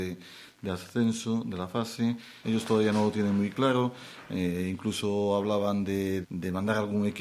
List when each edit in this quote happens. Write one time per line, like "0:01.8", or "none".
0:02.4
0:06.2